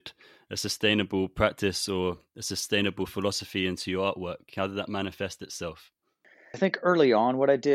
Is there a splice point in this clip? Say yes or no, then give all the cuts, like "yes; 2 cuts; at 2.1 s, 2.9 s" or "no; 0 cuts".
yes; 1 cut; at 6.5 s